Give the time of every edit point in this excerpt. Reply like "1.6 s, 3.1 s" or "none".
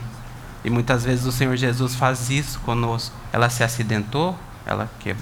3.3 s